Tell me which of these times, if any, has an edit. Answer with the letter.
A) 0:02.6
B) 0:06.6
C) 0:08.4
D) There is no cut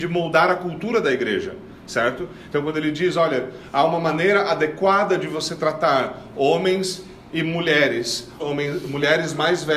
C